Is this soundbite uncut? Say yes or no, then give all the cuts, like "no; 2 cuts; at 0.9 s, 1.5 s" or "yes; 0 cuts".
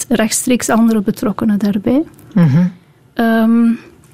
no; 1 cut; at 3.1 s